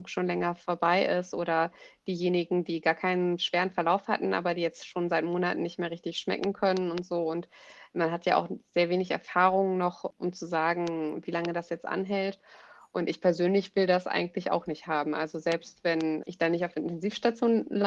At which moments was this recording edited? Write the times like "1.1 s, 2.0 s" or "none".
none